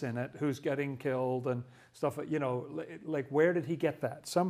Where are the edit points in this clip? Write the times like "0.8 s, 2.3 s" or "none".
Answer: none